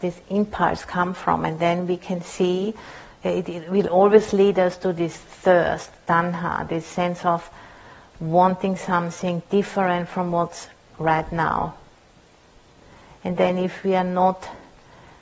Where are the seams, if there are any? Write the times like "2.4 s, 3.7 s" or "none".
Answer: none

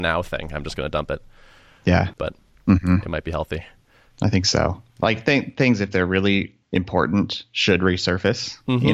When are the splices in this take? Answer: 2.2 s

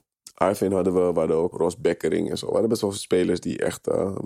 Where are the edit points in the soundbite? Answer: 1.5 s

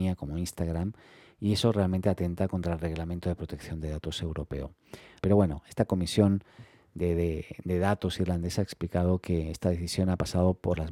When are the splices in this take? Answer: 5.2 s

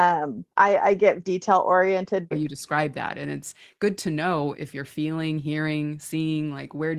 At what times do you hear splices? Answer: 1.2 s, 2.3 s, 4.5 s

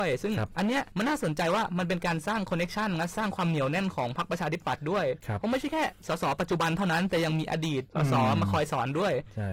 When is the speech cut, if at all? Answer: none

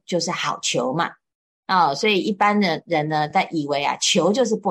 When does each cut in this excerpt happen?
none

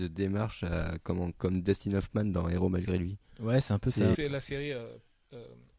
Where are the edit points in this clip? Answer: 4.1 s

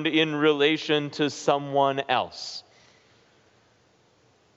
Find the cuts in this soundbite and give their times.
none

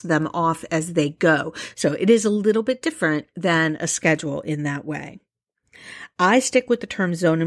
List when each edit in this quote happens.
1.7 s

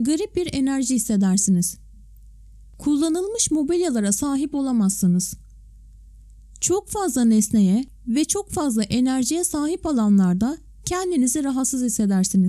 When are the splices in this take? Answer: none

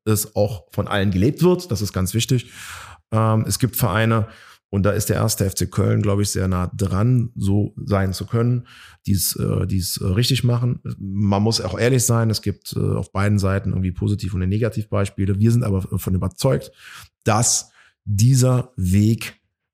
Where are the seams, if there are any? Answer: none

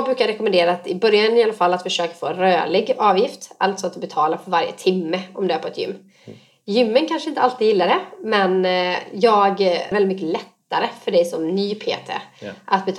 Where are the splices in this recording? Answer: 9.9 s

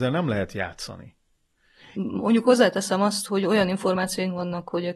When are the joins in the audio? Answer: 1.9 s, 3.3 s

